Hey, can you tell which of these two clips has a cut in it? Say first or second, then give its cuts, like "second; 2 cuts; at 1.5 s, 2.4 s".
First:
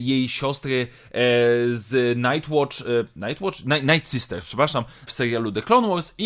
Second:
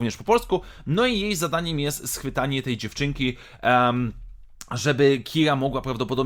first; 1 cut; at 5.1 s